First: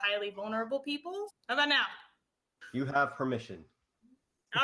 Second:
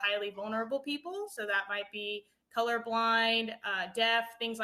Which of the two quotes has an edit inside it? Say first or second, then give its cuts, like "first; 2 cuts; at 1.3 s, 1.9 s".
first; 1 cut; at 1.3 s